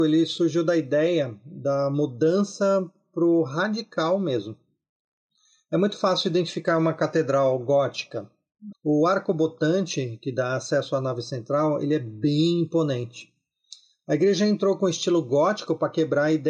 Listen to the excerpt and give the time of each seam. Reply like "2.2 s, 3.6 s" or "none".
8.7 s